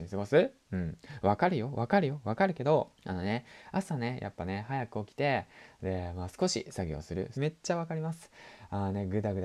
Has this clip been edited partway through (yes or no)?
yes